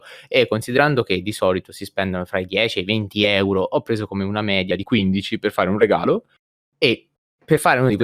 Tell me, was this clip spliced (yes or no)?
no